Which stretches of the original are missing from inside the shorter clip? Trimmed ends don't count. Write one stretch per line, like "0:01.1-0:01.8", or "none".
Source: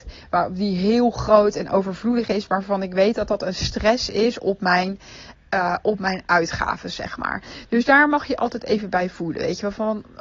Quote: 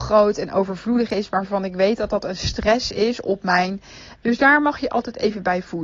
0:05.4-0:07.7